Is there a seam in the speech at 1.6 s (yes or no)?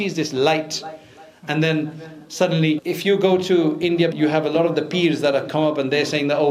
no